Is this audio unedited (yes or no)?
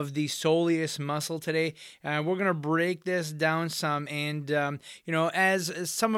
yes